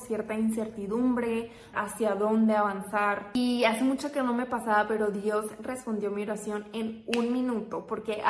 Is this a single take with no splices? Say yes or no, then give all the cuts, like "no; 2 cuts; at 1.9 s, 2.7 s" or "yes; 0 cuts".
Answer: no; 1 cut; at 1.7 s